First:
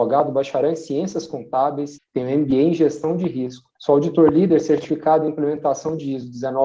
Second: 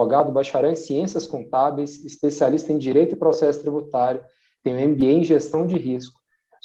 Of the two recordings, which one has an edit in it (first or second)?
first